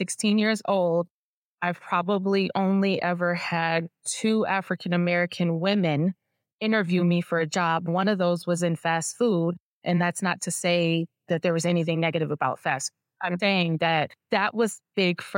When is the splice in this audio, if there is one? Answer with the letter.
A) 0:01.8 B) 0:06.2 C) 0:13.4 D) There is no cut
C